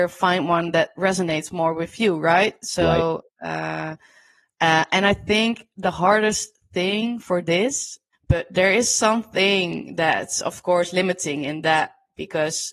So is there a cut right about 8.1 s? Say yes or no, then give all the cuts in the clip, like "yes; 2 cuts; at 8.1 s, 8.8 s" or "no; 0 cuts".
yes; 1 cut; at 8.1 s